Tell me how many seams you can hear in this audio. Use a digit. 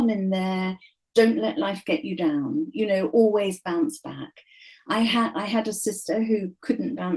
0